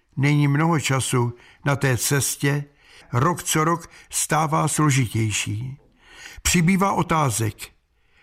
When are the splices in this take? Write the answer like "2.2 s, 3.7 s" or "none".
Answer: 3.0 s